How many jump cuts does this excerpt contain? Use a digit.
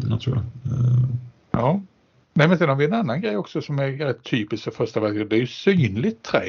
1